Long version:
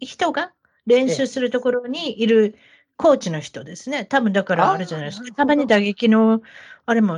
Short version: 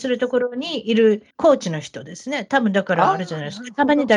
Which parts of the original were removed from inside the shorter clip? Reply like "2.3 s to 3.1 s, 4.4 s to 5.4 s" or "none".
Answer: 2.6 s to 2.9 s

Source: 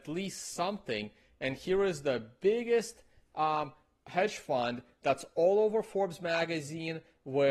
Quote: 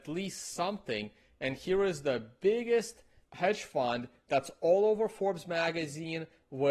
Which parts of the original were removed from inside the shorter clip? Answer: 3.2 s to 4.0 s

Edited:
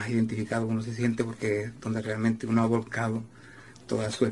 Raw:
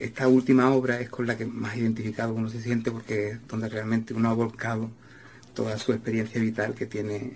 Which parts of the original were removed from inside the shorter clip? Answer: none

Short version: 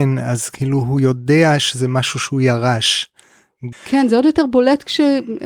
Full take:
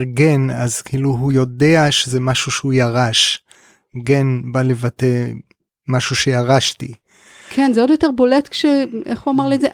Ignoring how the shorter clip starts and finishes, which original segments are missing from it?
4.0 s to 7.4 s

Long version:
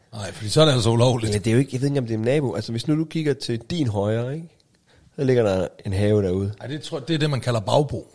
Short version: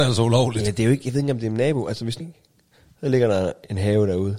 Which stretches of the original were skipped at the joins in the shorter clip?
2.9 s to 4.4 s

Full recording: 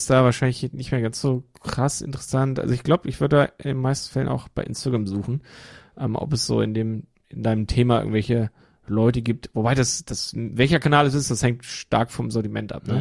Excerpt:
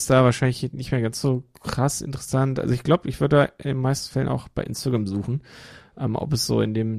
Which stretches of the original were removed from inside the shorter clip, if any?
none

